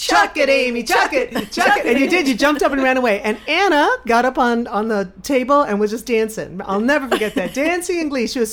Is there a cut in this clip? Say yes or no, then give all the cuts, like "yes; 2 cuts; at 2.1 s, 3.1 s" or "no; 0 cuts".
no; 0 cuts